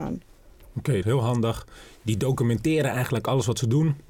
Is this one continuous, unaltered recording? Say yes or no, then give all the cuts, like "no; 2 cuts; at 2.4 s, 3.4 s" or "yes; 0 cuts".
no; 1 cut; at 1.0 s